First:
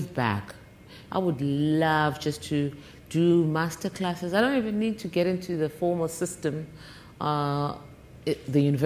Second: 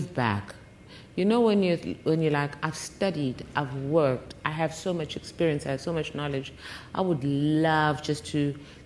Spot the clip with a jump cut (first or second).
first